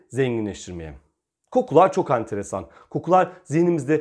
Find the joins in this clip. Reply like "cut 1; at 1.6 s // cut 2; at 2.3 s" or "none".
none